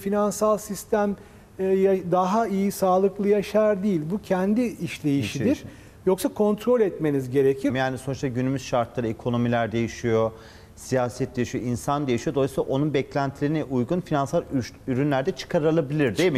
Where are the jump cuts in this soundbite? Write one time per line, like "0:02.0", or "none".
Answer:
0:07.7